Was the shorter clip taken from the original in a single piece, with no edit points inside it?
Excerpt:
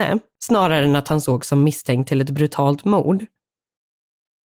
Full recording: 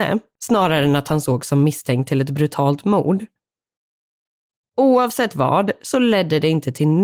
yes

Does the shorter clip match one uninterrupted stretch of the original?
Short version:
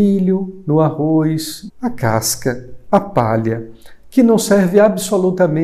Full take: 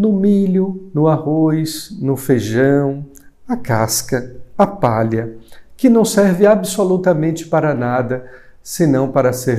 no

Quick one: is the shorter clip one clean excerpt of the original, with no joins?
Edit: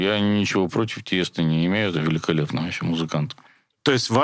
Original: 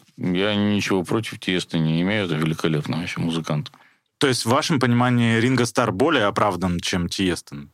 yes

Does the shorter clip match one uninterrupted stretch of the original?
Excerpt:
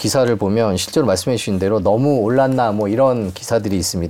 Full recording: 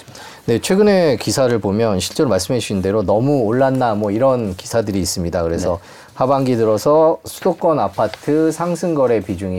yes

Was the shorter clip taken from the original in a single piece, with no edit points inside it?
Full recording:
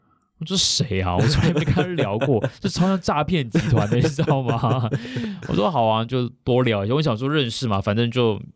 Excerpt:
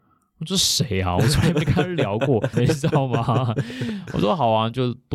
no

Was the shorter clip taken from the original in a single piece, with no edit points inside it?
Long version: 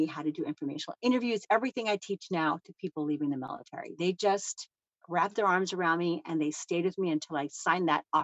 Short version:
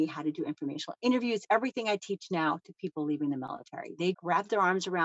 no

